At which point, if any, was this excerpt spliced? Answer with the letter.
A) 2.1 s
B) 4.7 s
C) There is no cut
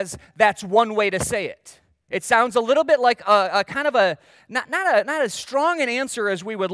A